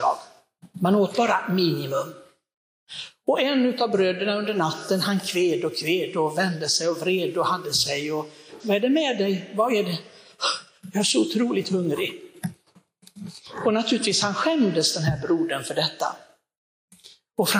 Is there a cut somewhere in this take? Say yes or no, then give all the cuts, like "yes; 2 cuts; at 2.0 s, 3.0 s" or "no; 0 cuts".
yes; 1 cut; at 8.6 s